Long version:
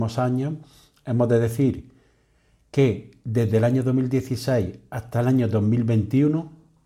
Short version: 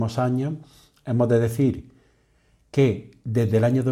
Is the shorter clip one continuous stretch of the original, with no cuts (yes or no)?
yes